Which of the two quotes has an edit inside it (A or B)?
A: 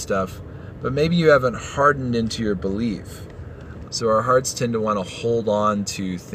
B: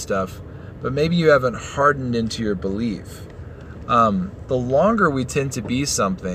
A